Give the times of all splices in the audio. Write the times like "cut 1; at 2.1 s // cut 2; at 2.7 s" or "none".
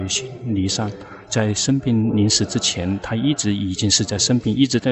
none